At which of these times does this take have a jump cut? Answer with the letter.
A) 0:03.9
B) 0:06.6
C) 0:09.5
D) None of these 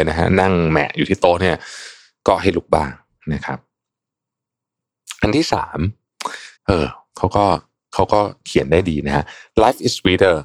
B